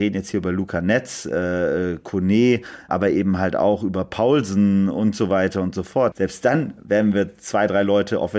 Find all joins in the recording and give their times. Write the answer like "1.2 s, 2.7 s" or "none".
2.9 s, 6.1 s